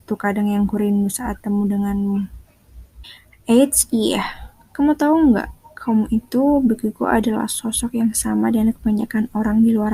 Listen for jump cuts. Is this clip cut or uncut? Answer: uncut